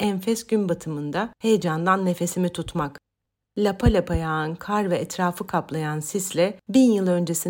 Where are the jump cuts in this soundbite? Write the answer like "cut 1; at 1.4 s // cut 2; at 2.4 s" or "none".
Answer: cut 1; at 3.4 s